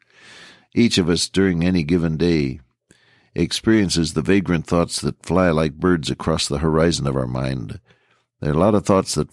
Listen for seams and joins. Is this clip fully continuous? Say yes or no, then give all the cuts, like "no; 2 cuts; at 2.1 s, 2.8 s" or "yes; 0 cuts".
yes; 0 cuts